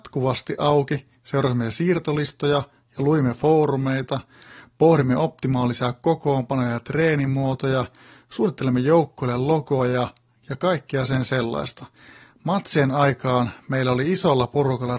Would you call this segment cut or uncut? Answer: uncut